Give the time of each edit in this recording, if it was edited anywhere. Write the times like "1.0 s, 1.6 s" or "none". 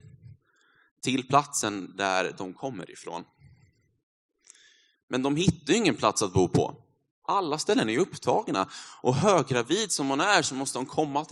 4.9 s